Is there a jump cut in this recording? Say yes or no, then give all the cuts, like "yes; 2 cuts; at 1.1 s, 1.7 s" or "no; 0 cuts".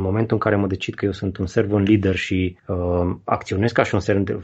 yes; 1 cut; at 2.6 s